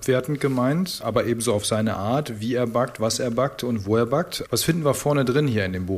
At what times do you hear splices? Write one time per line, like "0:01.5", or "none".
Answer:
0:01.0
0:04.5